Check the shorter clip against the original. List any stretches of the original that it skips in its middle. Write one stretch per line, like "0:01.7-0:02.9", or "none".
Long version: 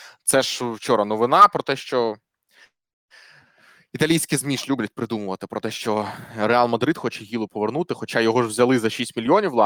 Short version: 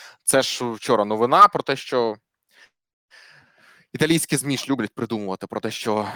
none

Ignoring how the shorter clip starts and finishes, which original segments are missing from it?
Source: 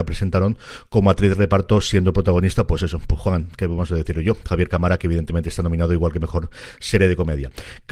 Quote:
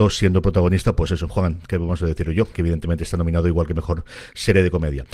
0:03.0-0:03.2
0:04.4-0:05.0

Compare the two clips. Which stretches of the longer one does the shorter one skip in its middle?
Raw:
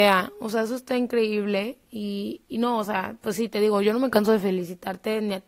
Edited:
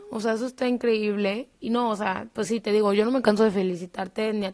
0:01.9-0:02.5

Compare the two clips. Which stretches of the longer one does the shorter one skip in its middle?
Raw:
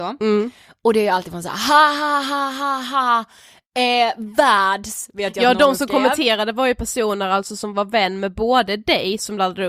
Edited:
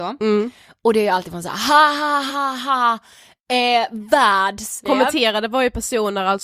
0:02.3-0:02.6
0:05.1-0:05.9

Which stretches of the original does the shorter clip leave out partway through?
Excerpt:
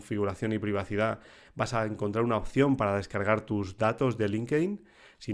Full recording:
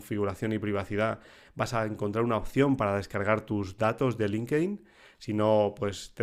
none

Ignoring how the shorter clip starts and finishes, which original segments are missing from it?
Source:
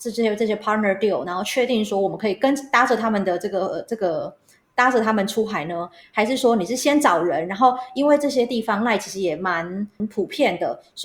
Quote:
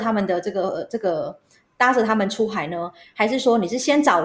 none

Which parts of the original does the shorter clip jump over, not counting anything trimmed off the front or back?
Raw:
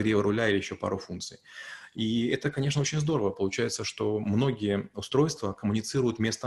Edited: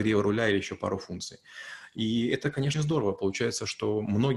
0:02.7-0:02.9

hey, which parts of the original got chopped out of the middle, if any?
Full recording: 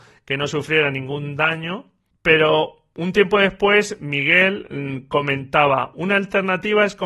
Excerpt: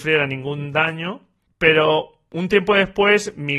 none

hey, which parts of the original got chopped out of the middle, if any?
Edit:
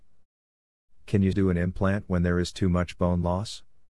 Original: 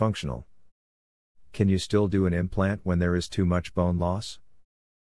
0:01.8-0:02.1

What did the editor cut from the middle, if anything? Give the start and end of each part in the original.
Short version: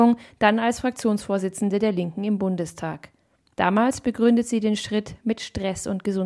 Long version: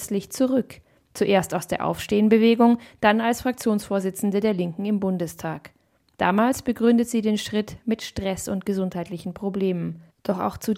none

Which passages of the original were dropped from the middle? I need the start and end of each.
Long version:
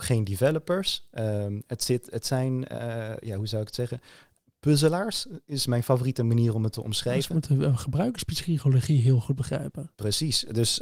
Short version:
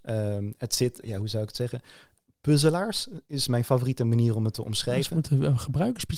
0:02.1-0:03.2

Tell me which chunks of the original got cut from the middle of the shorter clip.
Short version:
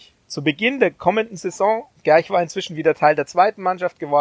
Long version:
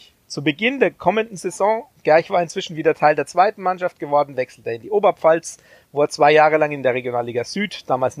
none

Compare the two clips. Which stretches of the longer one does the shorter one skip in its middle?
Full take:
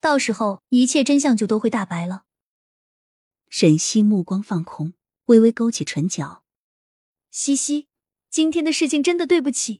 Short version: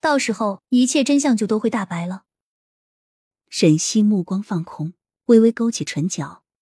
none

